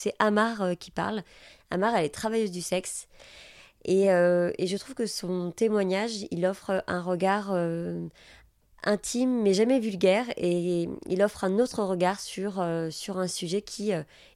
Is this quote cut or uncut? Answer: uncut